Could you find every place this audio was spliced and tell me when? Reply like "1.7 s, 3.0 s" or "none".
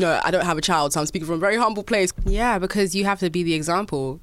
2.1 s